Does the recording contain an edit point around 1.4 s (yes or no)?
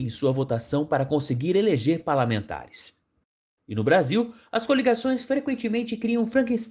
no